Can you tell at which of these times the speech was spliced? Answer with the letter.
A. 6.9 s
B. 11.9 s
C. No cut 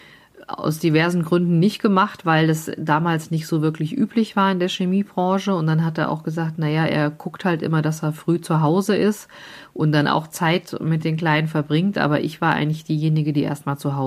C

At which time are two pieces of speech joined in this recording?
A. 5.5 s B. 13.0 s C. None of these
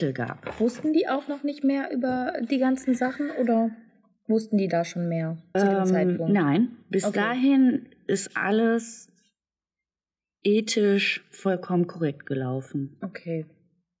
A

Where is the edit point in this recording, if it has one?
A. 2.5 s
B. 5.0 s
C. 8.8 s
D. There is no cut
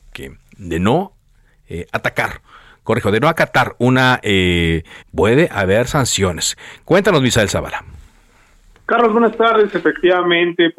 B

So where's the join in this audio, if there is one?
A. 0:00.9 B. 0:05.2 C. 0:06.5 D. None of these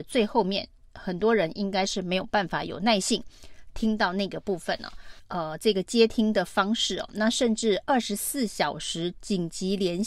B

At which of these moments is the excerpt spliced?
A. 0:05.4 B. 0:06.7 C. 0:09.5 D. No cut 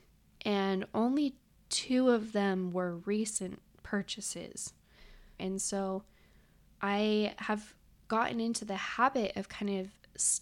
A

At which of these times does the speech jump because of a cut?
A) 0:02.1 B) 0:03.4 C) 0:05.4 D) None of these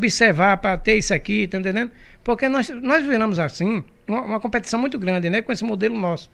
D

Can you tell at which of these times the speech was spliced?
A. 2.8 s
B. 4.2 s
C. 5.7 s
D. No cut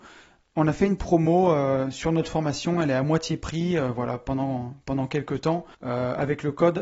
C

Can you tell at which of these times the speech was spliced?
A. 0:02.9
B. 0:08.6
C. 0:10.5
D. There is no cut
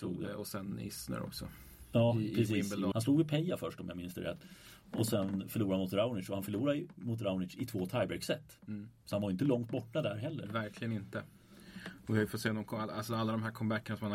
A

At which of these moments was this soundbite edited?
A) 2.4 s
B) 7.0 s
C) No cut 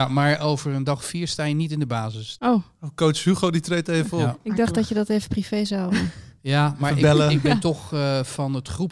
A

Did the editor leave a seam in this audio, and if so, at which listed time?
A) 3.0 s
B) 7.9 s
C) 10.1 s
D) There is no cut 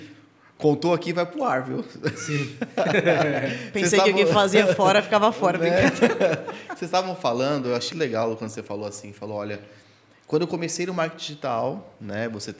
B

